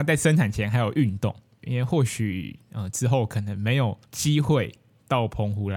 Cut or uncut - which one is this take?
cut